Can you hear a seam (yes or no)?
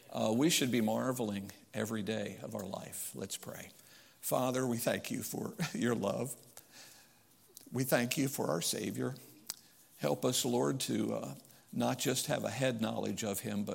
no